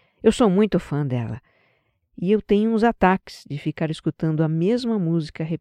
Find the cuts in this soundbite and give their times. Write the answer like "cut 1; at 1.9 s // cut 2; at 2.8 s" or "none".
cut 1; at 2.0 s